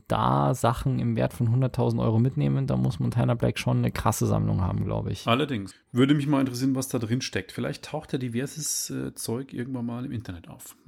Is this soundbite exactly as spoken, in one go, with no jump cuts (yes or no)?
no